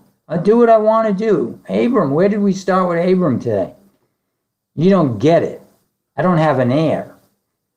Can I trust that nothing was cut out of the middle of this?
no; 1 cut; at 4.5 s

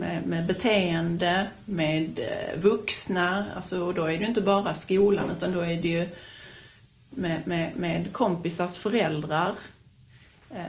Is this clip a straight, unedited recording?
yes; 0 cuts

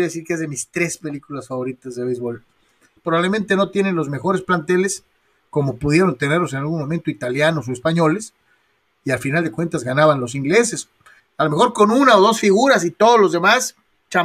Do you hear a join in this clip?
yes; 2 cuts; at 3.0 s, 11.2 s

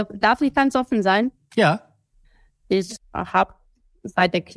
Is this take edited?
no; 0 cuts

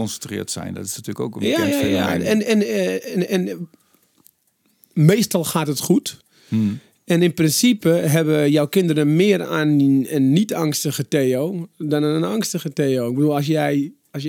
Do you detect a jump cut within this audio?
no; 0 cuts

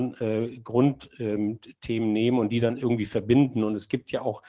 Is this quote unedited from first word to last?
yes; 0 cuts

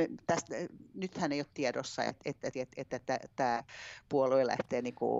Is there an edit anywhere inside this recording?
yes; 1 cut; at 2.5 s

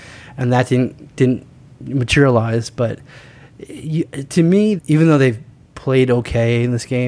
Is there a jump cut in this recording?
yes; 1 cut; at 4.8 s

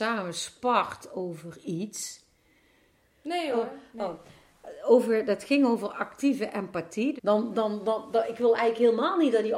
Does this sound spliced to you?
yes; 2 cuts; at 3.0 s, 7.2 s

